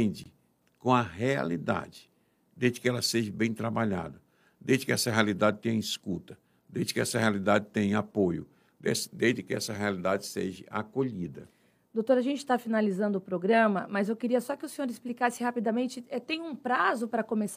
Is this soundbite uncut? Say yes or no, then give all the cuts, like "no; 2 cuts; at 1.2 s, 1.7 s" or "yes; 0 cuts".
yes; 0 cuts